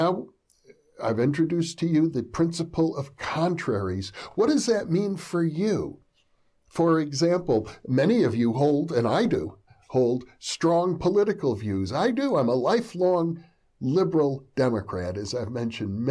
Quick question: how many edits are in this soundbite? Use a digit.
0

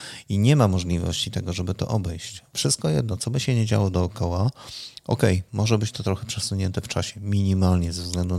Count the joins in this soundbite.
0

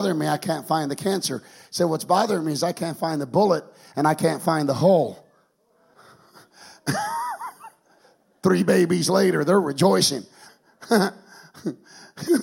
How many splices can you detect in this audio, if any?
2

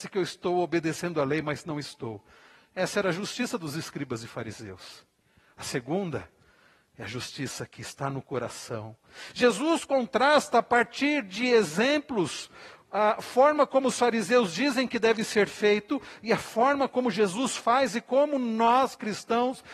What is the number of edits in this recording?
0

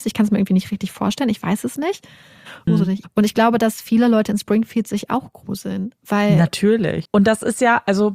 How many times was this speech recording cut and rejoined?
2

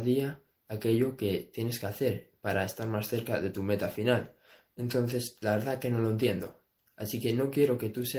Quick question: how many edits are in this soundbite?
0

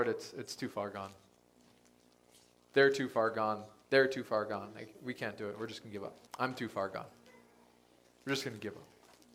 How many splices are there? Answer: 1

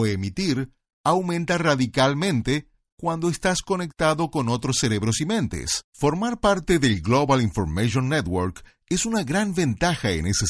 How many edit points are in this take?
1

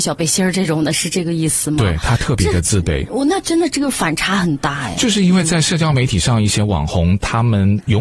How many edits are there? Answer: 0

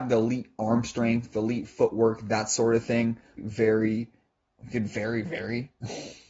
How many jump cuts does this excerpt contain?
1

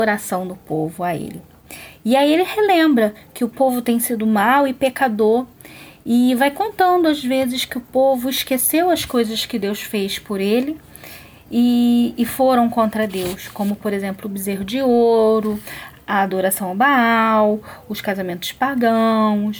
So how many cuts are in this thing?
0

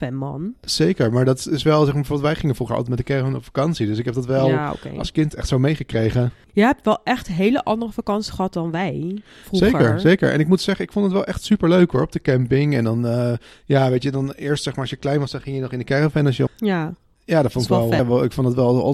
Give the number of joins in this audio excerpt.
2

